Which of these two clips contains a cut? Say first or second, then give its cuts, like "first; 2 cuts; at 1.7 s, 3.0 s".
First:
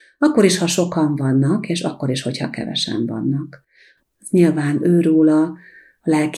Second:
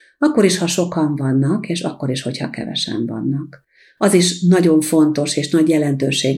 first; 1 cut; at 4.0 s